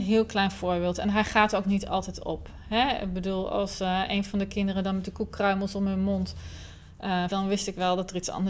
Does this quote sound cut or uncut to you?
cut